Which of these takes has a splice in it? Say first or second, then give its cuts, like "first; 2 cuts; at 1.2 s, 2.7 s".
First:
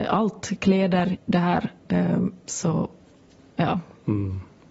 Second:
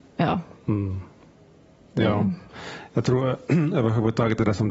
first; 2 cuts; at 1.1 s, 2.5 s